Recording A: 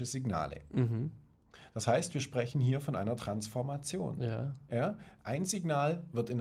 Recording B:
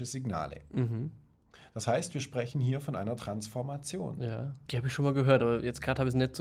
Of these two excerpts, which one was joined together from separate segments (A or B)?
B